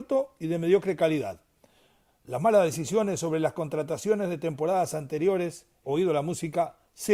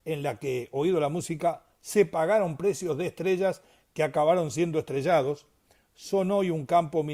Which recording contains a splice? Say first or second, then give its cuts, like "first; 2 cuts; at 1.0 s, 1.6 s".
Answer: first; 2 cuts; at 2.0 s, 5.8 s